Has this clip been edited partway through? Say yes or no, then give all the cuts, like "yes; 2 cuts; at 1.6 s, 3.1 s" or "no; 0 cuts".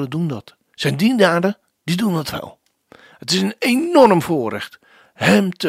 no; 0 cuts